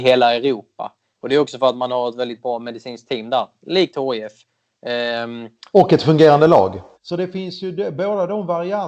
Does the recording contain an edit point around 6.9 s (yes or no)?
yes